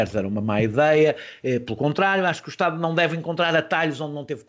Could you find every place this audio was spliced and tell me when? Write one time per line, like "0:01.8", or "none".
none